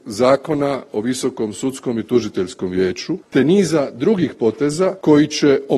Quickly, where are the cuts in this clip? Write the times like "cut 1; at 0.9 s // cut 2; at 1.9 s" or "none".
cut 1; at 3.2 s